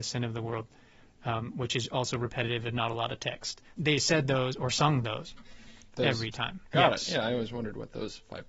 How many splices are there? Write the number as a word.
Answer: two